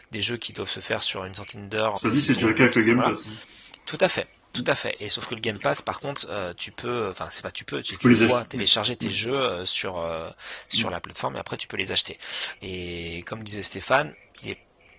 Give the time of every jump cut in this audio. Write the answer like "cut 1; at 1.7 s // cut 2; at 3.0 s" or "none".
cut 1; at 1.9 s // cut 2; at 12.6 s